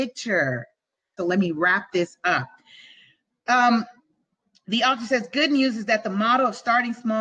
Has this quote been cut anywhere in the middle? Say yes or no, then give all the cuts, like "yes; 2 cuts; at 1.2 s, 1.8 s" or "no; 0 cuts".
yes; 1 cut; at 1.2 s